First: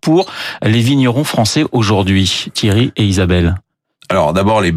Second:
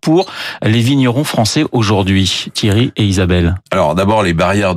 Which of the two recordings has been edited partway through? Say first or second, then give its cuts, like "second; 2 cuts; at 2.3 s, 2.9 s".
second; 1 cut; at 3.7 s